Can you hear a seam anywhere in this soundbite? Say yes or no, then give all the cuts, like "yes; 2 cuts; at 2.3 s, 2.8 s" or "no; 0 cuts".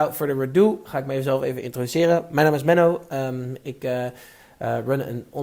no; 0 cuts